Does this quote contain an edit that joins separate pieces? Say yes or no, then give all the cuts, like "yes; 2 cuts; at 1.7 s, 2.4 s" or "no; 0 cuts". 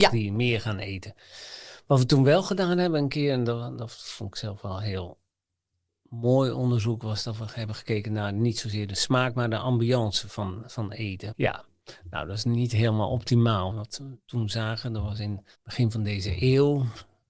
yes; 3 cuts; at 11.3 s, 13.7 s, 15.5 s